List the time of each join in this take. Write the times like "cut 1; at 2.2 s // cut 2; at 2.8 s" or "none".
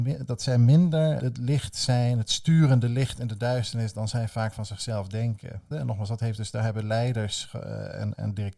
cut 1; at 1.2 s // cut 2; at 5.7 s

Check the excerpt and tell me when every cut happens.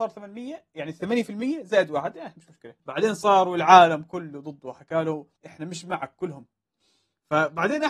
cut 1; at 2.8 s // cut 2; at 5.4 s

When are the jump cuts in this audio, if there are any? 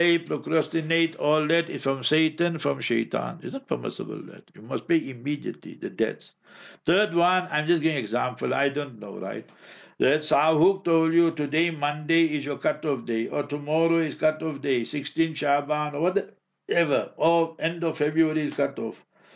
none

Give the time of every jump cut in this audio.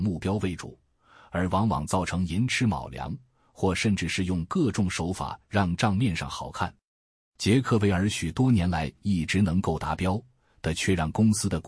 cut 1; at 7.3 s

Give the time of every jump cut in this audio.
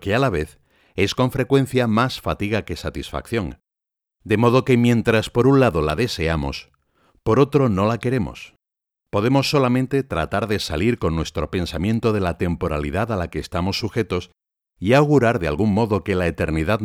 none

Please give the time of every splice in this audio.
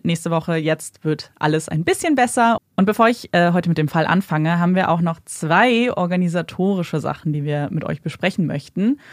cut 1; at 2.6 s

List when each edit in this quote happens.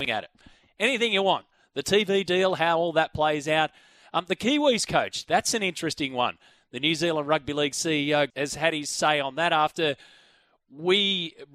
cut 1; at 8.3 s

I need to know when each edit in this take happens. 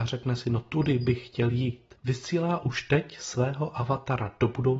cut 1; at 2.0 s

